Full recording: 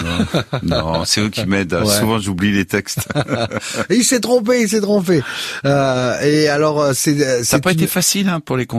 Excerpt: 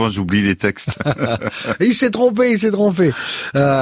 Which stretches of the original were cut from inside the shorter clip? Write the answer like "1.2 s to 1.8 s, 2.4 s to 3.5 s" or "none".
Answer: none